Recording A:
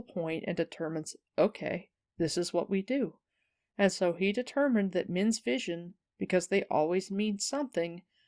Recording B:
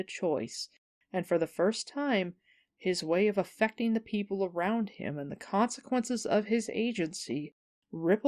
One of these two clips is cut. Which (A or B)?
B